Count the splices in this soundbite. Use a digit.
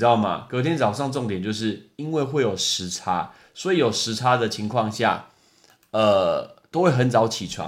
0